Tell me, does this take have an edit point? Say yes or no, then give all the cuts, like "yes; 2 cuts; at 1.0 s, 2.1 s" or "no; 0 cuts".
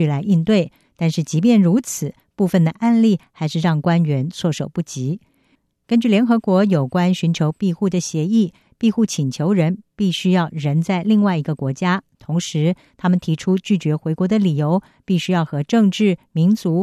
no; 0 cuts